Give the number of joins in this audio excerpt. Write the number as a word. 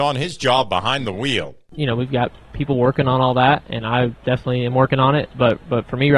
zero